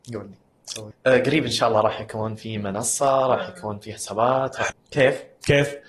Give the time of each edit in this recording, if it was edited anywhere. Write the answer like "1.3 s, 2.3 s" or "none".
0.9 s, 4.7 s